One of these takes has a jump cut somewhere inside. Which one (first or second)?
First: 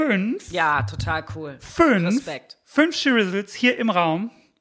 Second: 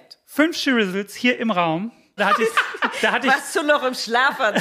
second